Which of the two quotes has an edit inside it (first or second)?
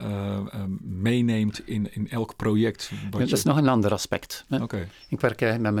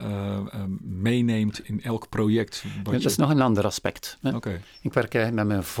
second